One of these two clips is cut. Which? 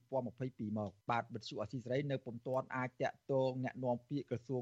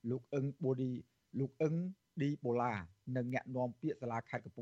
first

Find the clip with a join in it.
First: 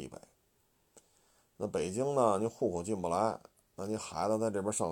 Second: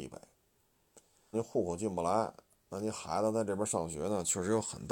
second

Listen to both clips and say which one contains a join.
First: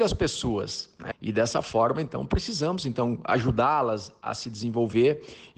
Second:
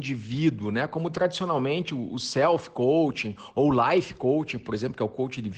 first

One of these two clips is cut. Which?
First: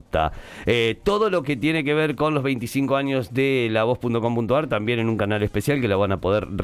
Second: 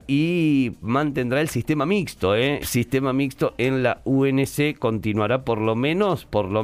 second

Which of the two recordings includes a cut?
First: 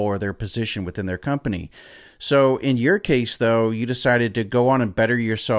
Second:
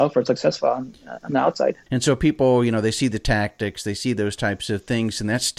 second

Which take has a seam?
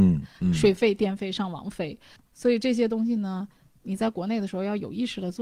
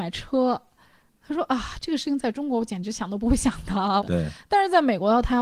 second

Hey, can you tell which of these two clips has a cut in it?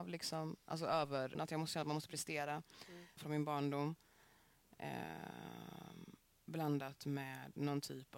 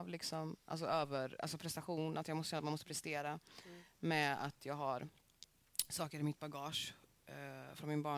first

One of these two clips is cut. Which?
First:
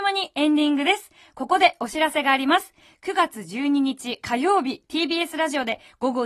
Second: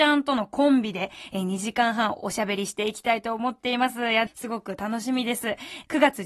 second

